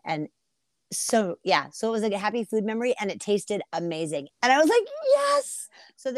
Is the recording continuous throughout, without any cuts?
no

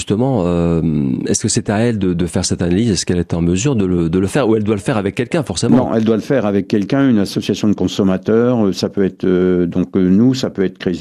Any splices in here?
no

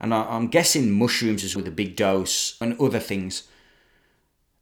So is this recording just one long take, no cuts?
no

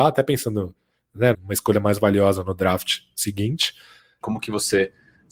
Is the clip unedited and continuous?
no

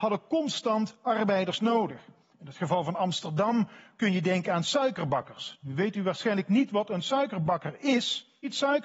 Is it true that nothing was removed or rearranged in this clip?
yes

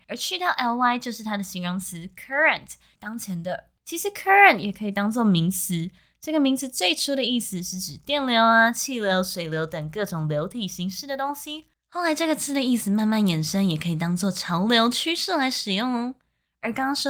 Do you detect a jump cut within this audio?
yes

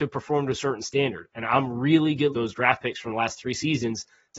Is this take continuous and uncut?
no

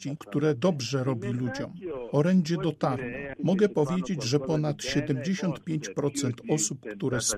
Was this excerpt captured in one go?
yes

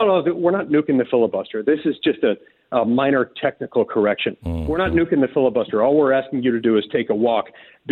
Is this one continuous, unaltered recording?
yes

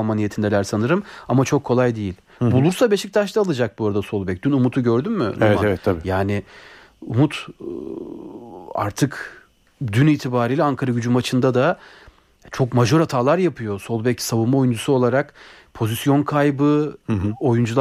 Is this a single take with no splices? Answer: yes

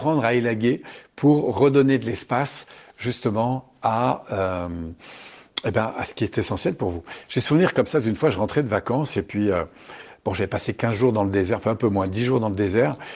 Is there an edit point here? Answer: no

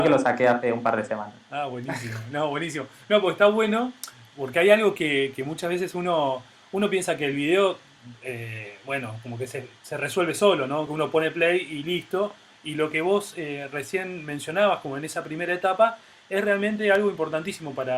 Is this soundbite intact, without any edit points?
yes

